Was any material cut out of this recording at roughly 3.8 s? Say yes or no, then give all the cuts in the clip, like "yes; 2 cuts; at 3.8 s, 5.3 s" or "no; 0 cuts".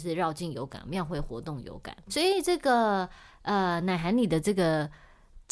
no; 1 cut; at 2.1 s